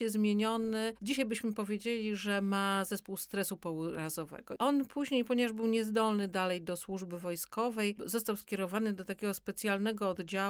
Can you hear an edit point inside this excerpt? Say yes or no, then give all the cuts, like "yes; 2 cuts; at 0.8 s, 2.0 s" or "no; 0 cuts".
no; 0 cuts